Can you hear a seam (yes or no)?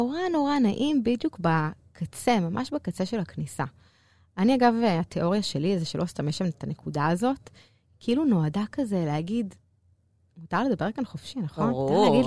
no